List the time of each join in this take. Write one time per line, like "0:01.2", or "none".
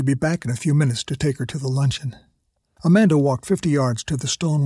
0:02.8